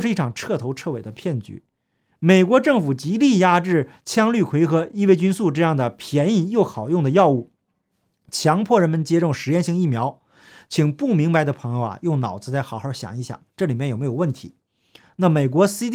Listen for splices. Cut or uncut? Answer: uncut